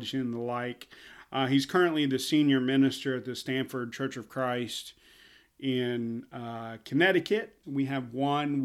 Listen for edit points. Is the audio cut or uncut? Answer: cut